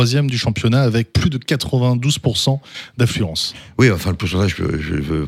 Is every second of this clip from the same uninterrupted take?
yes; 0 cuts

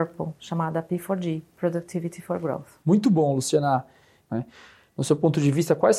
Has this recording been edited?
yes; 1 cut; at 4.2 s

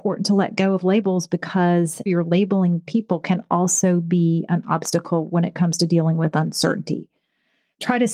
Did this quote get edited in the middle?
yes; 1 cut; at 2.1 s

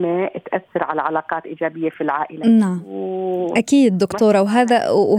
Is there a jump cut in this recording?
no; 0 cuts

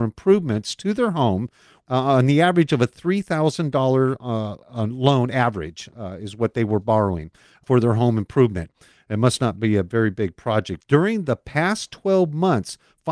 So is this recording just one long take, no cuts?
no; 1 cut; at 10.8 s

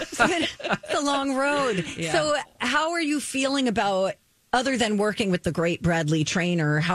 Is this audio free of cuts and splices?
yes; 0 cuts

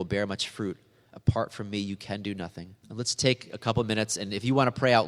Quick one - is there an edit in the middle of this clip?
yes; 1 cut; at 2.8 s

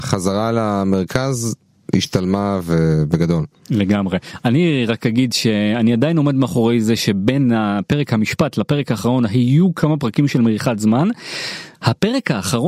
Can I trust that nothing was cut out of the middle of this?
yes; 0 cuts

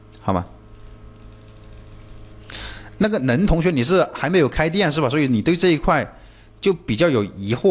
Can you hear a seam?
no; 0 cuts

